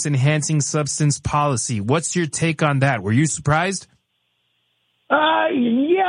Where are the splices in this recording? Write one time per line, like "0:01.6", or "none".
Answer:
none